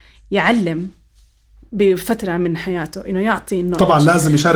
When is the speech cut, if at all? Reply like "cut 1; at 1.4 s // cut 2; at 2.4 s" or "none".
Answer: none